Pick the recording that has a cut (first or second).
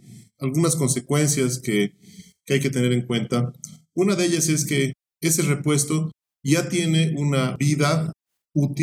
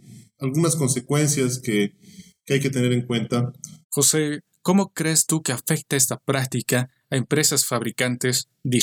second